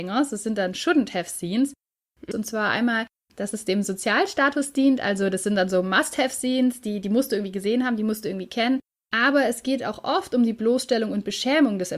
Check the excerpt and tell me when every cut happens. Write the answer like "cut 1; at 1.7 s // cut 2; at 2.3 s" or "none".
cut 1; at 2.3 s